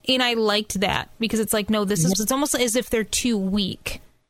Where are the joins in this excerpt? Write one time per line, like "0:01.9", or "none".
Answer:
0:02.1